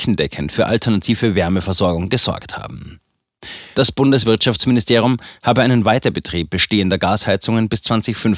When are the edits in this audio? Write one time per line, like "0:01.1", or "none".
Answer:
0:03.7